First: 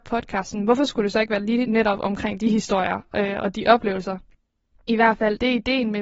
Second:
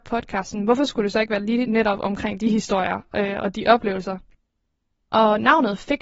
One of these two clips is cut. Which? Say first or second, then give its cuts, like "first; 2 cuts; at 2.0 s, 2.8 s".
first; 1 cut; at 4.7 s